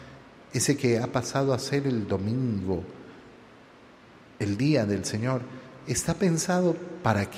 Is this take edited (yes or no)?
no